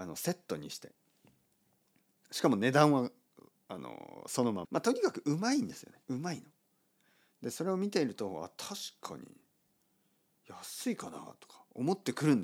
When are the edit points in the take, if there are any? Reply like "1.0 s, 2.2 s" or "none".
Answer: 4.6 s, 6.0 s